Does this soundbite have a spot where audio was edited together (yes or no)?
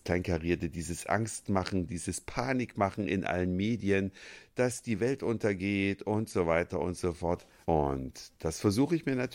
yes